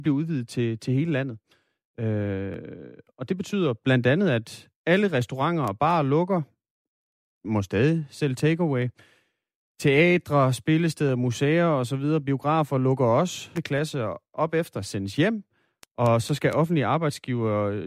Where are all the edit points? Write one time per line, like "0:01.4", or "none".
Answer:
0:13.6